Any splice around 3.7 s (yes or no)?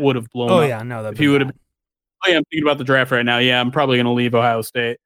no